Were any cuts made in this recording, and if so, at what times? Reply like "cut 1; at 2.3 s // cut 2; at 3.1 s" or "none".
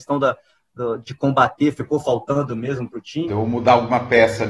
cut 1; at 3.3 s